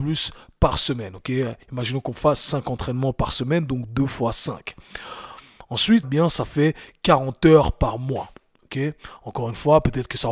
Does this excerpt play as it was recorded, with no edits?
no; 1 cut; at 6.0 s

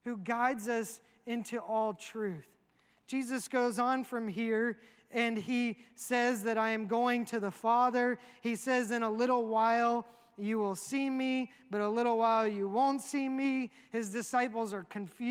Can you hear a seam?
no; 0 cuts

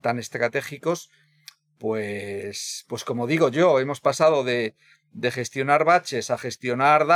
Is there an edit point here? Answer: no; 0 cuts

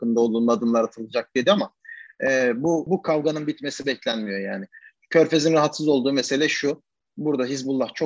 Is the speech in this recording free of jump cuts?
no; 1 cut; at 2.9 s

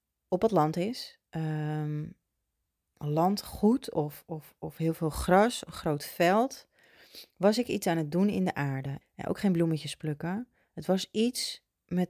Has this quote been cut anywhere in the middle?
yes; 1 cut; at 9.0 s

